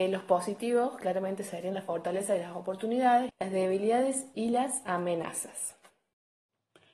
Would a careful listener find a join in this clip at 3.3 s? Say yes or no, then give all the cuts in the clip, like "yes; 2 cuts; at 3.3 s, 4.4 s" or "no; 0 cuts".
yes; 1 cut; at 3.3 s